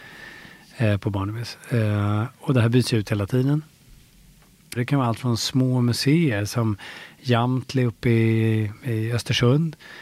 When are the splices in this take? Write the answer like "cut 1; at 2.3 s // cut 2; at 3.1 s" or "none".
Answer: cut 1; at 4.8 s